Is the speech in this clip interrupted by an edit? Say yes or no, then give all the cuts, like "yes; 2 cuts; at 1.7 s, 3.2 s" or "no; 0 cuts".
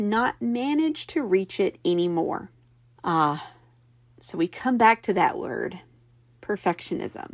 yes; 1 cut; at 3.0 s